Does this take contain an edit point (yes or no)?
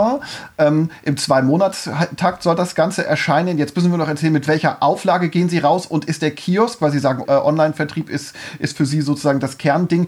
yes